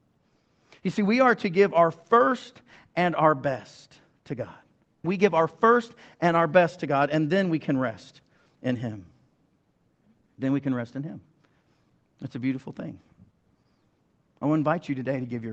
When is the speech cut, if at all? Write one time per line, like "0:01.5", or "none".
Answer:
0:05.0

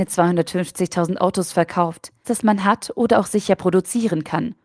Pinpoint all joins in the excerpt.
0:02.2

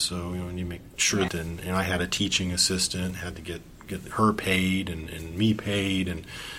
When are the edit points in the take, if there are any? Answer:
0:01.3

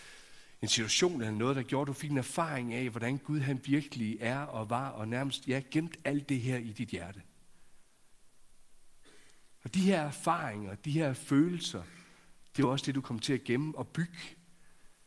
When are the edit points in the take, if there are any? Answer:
none

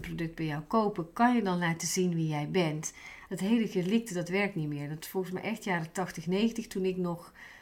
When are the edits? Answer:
0:03.3

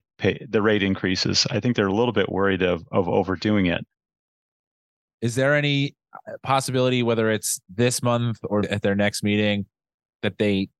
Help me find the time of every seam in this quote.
0:05.1
0:08.6

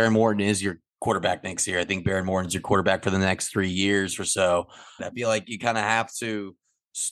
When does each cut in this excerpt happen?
0:05.0

